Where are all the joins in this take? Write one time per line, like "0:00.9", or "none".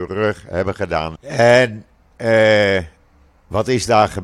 0:01.2
0:03.3